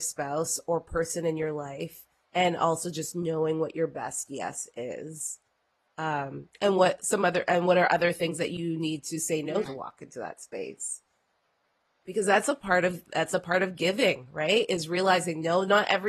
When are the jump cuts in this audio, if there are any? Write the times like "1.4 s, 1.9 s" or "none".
2.3 s, 9.7 s